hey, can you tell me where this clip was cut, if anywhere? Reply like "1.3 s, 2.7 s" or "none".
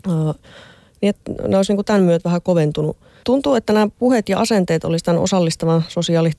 3.2 s